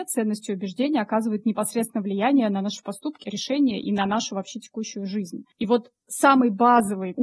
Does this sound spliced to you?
no; 0 cuts

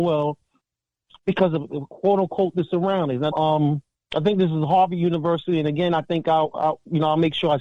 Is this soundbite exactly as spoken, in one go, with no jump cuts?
no; 1 cut; at 3.3 s

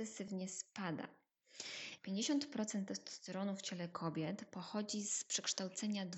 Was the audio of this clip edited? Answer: yes; 1 cut; at 2.0 s

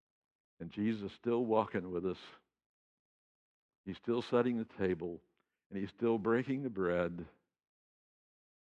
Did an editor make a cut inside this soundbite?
no; 0 cuts

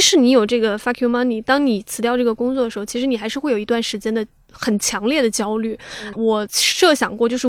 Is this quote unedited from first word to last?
no; 1 cut; at 6.1 s

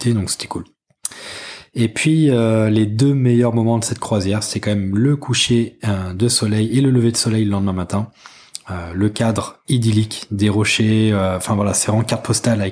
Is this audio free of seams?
yes; 0 cuts

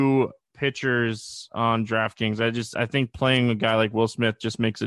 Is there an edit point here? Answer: no; 0 cuts

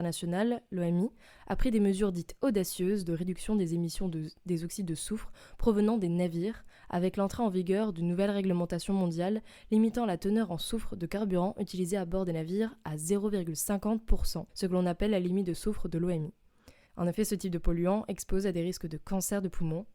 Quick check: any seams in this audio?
yes; 2 cuts; at 14.5 s, 16.9 s

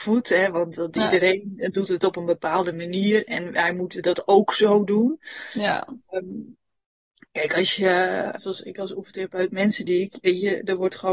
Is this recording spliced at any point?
yes; 2 cuts; at 8.4 s, 10.2 s

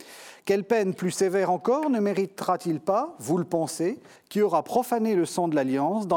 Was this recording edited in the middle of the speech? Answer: yes; 1 cut; at 4.2 s

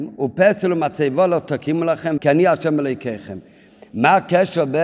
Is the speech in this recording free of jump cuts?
no; 1 cut; at 2.2 s

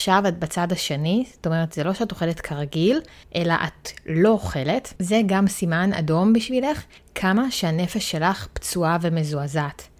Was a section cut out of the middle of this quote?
no; 0 cuts

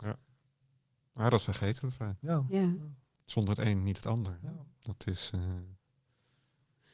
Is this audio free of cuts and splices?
yes; 0 cuts

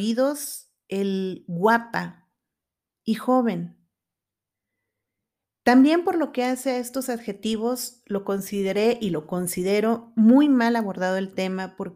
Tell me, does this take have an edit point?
no; 0 cuts

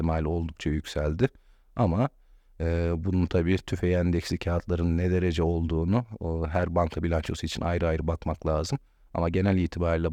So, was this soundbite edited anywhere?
no; 0 cuts

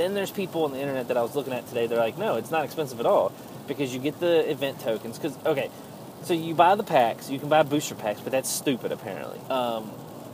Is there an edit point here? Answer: yes; 1 cut; at 9.5 s

